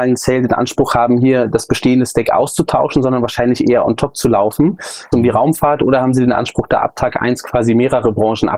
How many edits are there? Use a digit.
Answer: 1